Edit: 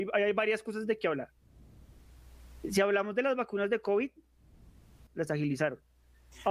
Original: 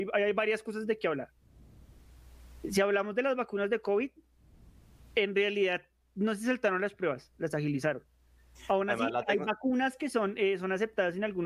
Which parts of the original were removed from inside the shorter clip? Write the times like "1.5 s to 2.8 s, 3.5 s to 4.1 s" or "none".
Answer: 5.1 s to 7.3 s